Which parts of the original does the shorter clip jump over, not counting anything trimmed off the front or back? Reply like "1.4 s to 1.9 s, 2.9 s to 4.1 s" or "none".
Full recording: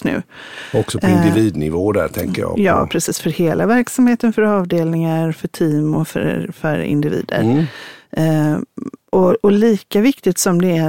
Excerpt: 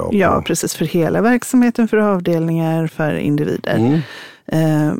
5.3 s to 6.5 s